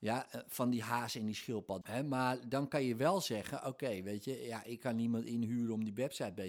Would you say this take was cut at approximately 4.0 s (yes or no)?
no